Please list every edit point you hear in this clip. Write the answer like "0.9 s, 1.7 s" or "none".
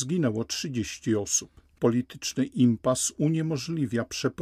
1.8 s